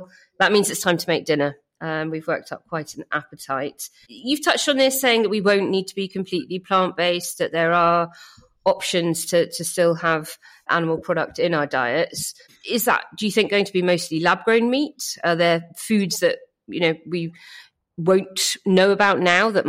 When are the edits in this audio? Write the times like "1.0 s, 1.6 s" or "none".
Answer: none